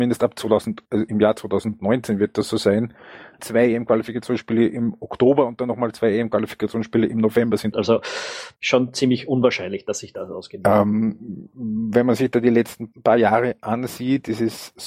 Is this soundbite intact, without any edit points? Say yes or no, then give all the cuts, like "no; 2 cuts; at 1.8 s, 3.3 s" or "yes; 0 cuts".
no; 2 cuts; at 3.4 s, 7.7 s